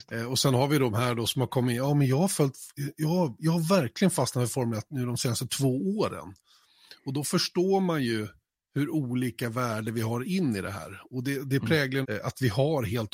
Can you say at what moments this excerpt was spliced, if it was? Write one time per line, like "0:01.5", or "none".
0:12.0